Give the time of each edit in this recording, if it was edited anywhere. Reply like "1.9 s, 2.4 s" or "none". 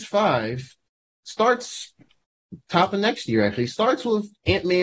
none